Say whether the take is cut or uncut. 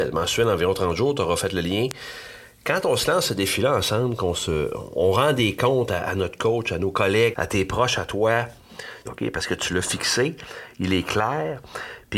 cut